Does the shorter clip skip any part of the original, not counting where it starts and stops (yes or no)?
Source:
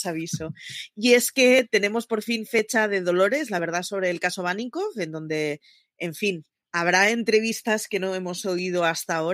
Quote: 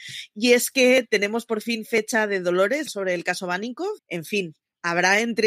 yes